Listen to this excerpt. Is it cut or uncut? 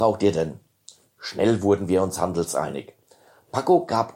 uncut